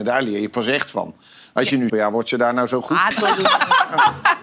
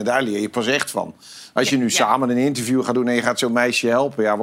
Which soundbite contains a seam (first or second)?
first